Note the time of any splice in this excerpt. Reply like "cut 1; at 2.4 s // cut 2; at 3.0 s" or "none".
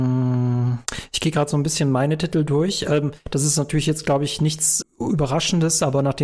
cut 1; at 4.8 s